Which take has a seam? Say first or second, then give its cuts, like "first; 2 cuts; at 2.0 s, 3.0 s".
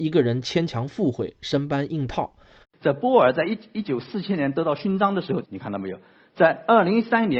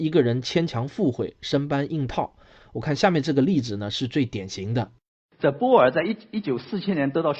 first; 2 cuts; at 2.6 s, 5.4 s